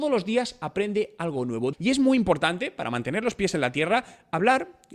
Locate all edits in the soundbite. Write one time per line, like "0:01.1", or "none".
0:01.7